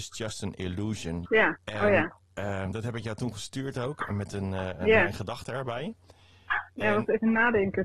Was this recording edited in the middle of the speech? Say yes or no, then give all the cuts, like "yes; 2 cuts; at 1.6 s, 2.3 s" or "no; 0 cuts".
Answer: yes; 1 cut; at 1.2 s